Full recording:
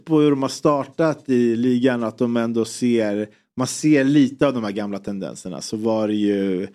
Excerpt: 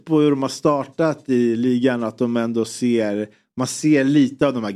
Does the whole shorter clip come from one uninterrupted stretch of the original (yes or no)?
yes